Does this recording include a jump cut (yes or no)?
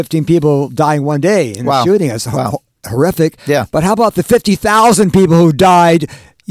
no